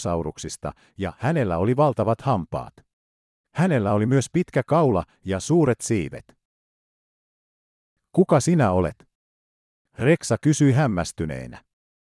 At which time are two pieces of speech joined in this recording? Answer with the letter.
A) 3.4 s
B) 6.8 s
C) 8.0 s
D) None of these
A